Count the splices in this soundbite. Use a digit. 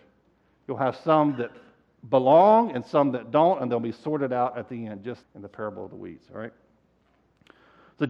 1